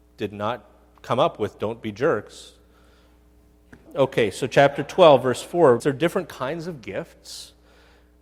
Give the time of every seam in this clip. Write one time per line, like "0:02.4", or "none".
0:03.9
0:05.8